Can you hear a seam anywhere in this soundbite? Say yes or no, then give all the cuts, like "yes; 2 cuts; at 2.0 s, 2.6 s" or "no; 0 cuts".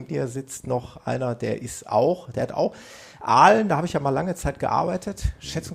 no; 0 cuts